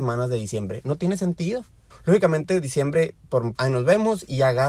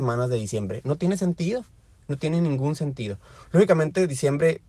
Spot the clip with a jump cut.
first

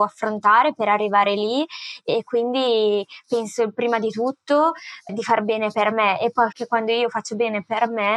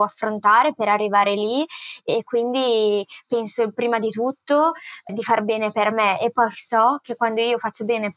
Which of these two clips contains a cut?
first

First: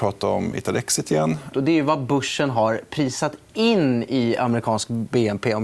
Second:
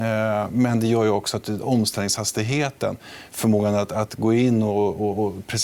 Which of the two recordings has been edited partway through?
first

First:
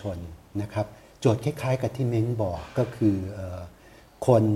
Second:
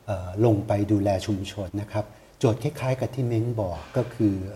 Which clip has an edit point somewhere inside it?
second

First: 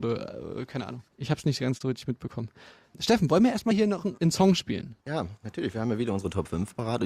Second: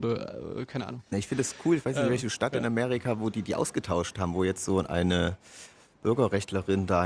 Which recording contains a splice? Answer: second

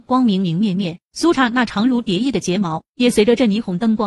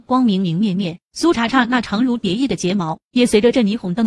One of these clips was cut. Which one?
first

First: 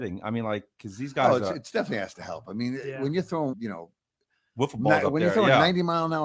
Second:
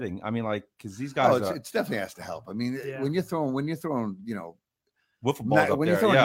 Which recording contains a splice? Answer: first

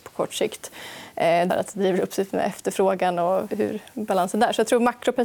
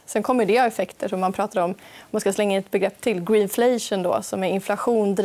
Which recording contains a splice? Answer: first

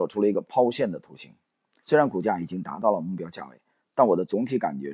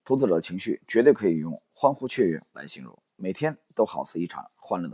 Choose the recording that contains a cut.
first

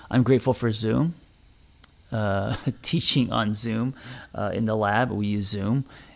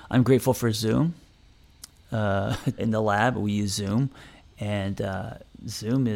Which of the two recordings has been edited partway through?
second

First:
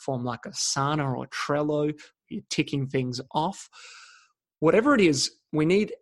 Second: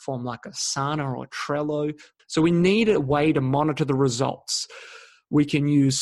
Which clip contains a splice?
second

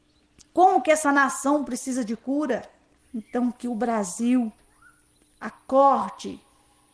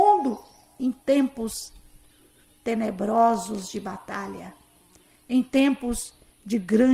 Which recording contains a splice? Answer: first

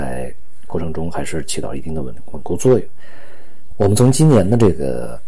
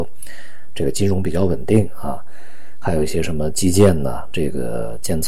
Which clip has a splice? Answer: first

